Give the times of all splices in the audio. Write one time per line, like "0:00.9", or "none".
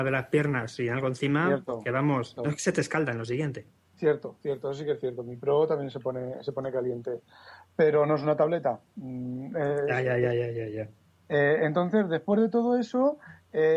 0:02.4